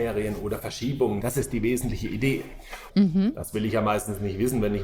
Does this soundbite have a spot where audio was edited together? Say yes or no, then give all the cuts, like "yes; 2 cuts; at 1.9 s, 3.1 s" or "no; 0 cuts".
yes; 2 cuts; at 1.2 s, 2.9 s